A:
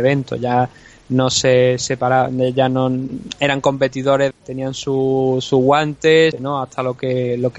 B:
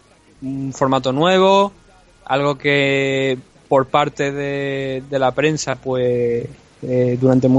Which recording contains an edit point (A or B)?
A